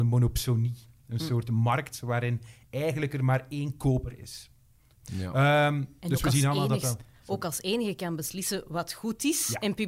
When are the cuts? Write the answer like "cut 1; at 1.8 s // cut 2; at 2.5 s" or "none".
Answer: cut 1; at 5.0 s